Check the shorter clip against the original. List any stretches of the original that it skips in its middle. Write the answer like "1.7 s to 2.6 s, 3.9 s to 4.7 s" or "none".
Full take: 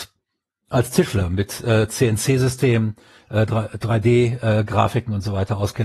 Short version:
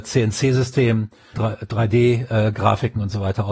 3.2 s to 3.5 s